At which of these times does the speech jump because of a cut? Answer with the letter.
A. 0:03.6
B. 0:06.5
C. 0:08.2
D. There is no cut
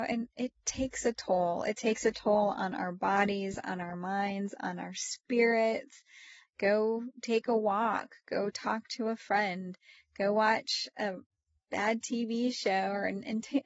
B